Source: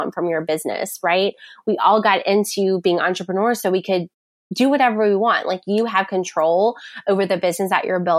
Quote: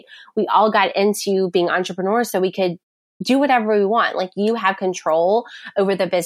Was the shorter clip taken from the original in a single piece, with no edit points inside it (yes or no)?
yes